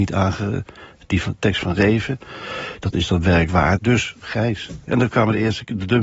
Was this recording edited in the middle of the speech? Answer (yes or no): yes